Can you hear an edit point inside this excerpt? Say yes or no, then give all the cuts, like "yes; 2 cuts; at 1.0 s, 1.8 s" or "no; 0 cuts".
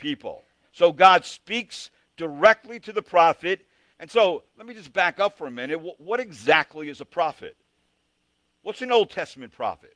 yes; 1 cut; at 3.9 s